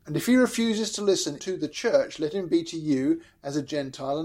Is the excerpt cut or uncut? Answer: cut